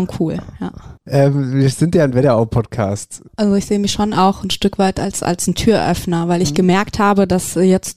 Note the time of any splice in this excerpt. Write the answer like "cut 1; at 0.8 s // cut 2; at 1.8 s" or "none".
cut 1; at 1.0 s // cut 2; at 3.3 s